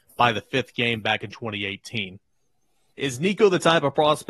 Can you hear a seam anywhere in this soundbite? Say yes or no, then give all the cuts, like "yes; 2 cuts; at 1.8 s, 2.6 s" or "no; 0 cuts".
yes; 1 cut; at 2.9 s